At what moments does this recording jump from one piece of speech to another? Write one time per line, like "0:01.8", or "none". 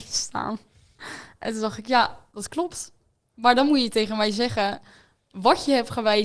none